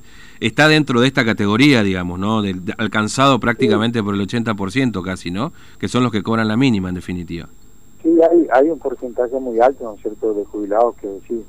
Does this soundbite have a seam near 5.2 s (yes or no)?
no